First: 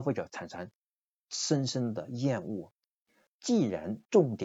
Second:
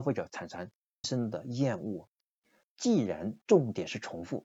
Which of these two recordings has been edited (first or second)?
second